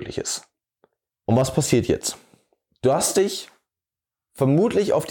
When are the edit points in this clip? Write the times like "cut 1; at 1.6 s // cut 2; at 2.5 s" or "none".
none